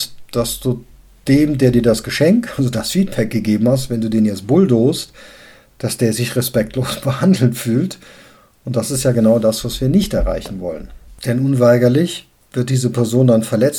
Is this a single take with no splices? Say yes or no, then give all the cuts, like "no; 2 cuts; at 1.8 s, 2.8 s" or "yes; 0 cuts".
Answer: yes; 0 cuts